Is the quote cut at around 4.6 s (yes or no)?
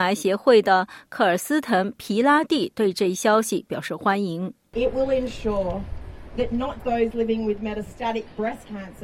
no